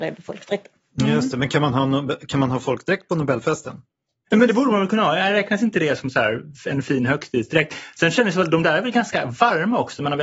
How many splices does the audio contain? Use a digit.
0